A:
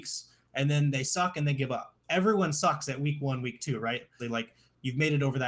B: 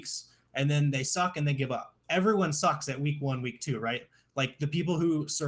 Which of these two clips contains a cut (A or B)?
A